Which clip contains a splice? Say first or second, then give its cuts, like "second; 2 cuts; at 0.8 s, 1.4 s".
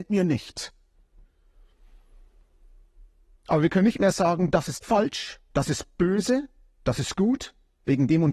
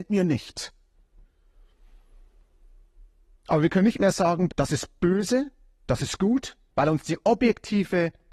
second; 2 cuts; at 4.5 s, 6.7 s